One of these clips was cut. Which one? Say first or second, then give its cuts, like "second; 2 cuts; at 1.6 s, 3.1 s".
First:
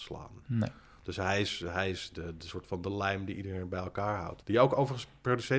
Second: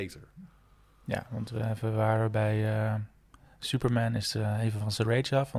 first; 1 cut; at 4.4 s